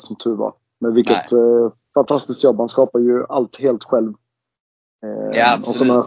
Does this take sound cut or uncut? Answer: uncut